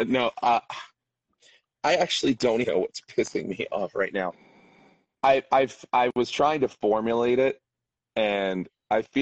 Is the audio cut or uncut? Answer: cut